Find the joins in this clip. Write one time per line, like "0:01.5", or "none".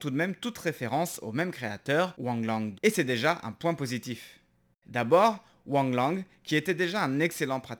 0:02.7
0:04.8